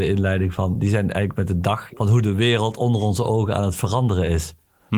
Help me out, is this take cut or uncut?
cut